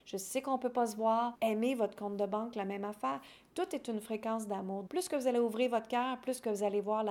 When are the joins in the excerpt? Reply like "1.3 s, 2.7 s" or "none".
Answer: 1.3 s, 4.9 s